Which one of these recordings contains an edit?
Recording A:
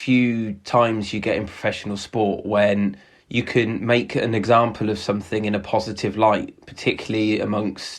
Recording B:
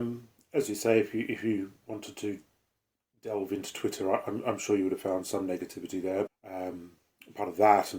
B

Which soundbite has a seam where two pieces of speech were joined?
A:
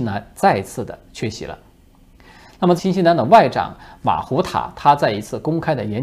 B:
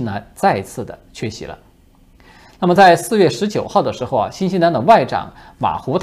A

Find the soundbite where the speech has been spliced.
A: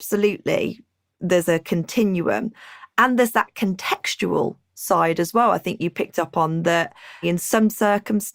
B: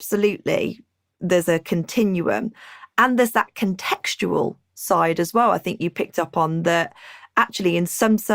A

